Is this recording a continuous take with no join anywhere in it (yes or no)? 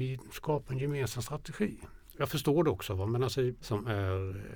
no